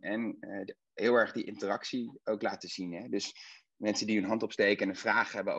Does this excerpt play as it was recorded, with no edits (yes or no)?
yes